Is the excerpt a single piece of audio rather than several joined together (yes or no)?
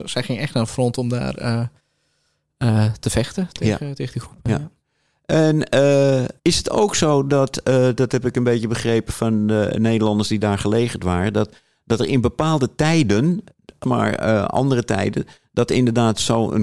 no